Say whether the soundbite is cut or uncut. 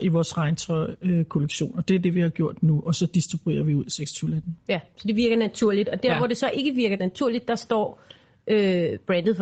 uncut